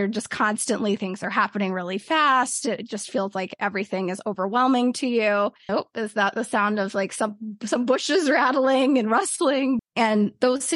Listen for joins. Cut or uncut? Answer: cut